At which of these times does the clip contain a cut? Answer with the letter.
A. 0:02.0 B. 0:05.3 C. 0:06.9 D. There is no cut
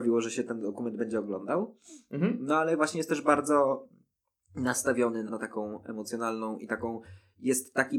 B